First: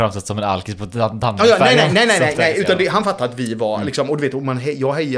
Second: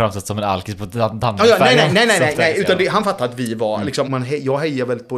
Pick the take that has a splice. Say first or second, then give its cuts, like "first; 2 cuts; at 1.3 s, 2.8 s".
second; 1 cut; at 4.1 s